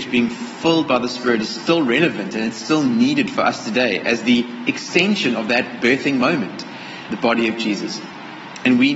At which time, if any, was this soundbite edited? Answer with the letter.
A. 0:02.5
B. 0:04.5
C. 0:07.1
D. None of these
C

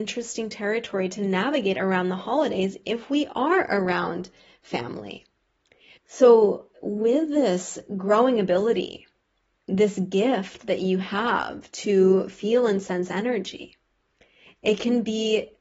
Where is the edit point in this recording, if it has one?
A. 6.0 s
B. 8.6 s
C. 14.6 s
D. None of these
A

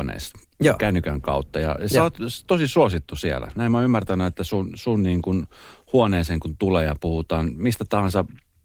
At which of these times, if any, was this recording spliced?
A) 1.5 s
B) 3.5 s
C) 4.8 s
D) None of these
D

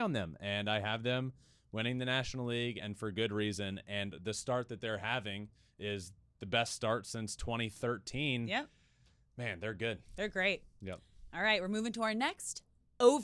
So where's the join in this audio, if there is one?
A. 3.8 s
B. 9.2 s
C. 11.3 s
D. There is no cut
D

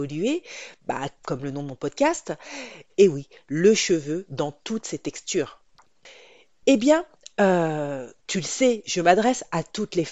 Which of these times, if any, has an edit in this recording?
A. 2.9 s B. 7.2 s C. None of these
A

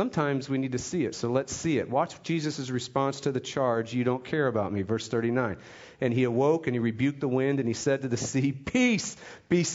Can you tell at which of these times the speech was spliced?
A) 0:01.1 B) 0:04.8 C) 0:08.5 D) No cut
A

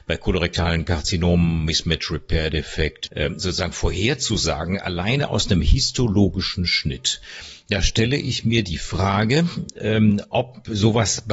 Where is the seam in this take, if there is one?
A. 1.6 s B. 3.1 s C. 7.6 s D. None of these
B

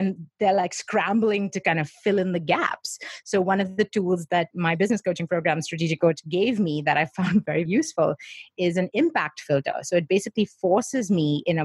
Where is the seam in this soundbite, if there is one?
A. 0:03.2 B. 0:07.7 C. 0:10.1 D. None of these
B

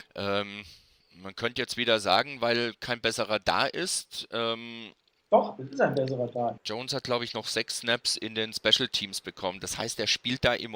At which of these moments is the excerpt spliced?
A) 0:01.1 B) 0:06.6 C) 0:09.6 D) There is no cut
B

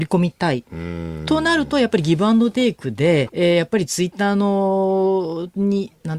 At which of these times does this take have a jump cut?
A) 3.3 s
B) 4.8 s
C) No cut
A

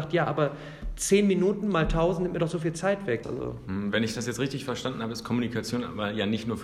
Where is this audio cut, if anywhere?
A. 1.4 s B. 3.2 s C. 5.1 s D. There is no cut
B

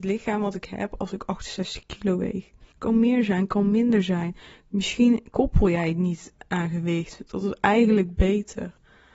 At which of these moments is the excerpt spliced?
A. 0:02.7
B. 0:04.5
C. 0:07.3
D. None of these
A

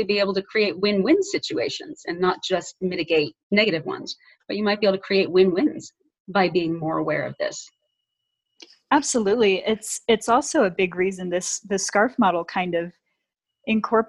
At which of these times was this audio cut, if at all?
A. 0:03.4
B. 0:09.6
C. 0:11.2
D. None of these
A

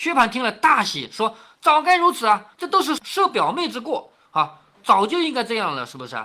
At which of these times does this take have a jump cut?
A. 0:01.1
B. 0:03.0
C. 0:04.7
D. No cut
B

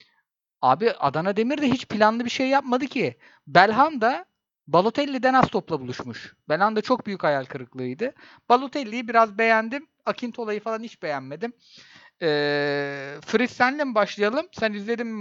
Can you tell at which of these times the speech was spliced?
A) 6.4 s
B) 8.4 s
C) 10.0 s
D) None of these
D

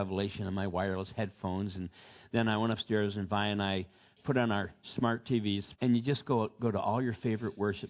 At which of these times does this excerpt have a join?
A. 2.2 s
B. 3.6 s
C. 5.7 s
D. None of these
C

